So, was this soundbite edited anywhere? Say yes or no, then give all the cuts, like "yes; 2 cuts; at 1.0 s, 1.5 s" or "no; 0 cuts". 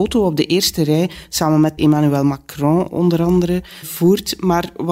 yes; 2 cuts; at 1.8 s, 3.8 s